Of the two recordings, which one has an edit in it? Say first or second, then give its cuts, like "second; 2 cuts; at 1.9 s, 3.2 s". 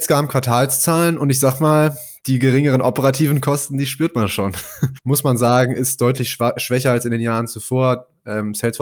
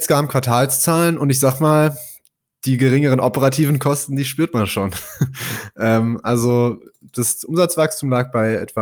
first; 2 cuts; at 2.2 s, 5.0 s